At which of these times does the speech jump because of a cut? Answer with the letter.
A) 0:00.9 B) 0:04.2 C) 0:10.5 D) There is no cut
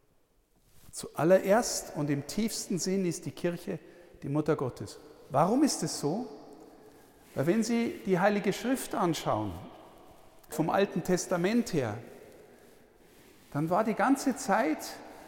C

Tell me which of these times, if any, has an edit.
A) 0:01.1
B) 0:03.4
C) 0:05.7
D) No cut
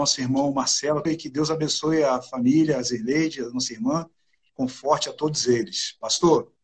A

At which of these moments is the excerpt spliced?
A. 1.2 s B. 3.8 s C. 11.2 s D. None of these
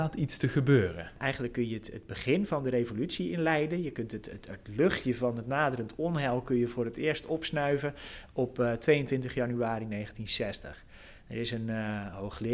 D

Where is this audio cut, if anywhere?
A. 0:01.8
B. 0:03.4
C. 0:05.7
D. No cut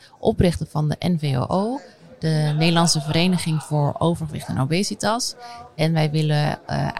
D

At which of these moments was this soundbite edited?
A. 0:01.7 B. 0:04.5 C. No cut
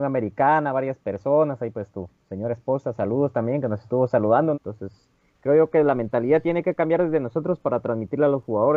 B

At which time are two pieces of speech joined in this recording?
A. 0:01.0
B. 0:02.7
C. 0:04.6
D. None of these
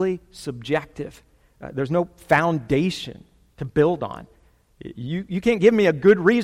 D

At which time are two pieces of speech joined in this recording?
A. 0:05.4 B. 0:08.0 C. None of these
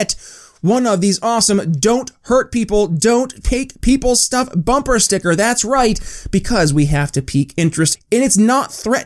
B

